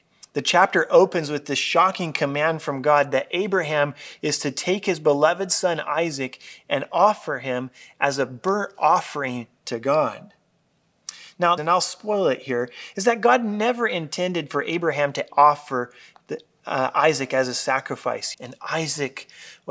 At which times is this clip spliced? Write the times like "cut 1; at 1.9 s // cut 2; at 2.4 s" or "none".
cut 1; at 11.6 s // cut 2; at 15.3 s // cut 3; at 18.3 s